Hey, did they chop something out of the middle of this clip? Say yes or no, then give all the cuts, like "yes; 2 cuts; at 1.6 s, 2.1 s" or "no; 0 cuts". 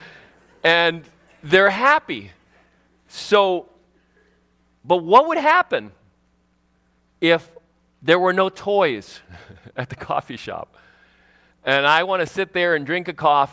no; 0 cuts